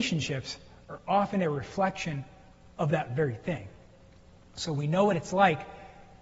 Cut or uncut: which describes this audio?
uncut